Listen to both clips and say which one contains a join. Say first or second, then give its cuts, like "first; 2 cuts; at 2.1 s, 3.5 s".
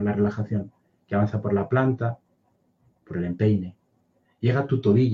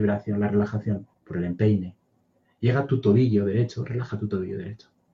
second; 1 cut; at 1.1 s